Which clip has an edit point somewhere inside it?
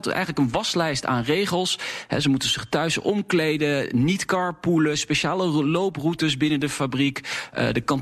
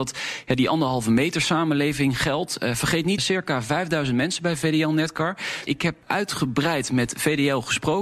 second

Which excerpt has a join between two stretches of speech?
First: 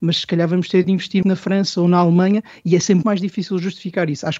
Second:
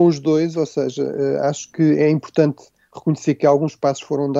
first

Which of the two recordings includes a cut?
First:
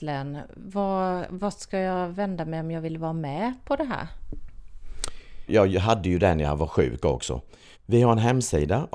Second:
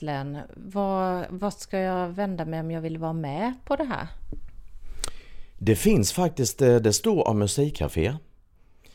first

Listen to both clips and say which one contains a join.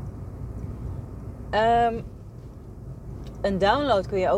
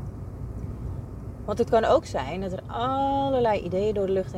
first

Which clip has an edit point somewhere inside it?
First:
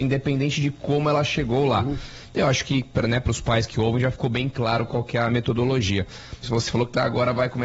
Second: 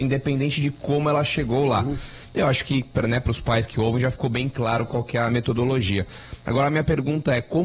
first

